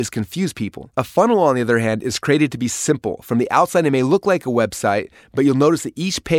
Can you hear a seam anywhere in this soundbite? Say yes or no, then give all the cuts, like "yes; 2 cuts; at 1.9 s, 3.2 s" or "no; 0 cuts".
yes; 1 cut; at 0.9 s